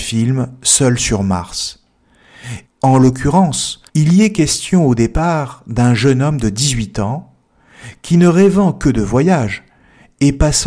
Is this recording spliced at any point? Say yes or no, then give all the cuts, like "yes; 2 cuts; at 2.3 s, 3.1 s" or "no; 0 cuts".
yes; 2 cuts; at 2.7 s, 3.9 s